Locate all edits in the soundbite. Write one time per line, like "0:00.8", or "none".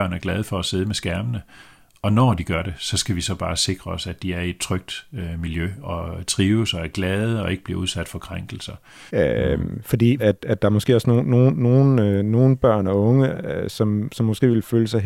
0:05.8
0:09.1
0:10.2